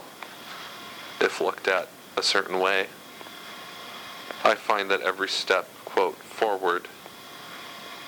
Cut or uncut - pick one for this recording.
uncut